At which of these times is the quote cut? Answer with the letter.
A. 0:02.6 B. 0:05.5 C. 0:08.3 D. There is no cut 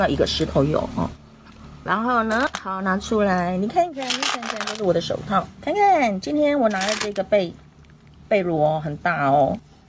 B